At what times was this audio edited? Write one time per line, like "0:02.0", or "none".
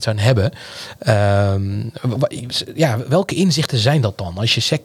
none